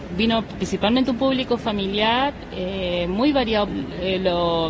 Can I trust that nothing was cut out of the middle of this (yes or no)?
no